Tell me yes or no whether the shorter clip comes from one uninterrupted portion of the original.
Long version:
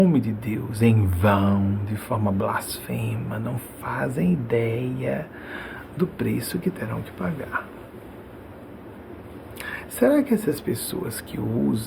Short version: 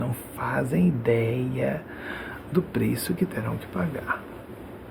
yes